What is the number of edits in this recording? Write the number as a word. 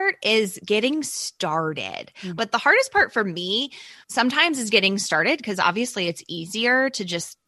two